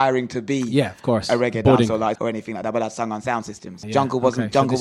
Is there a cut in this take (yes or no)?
yes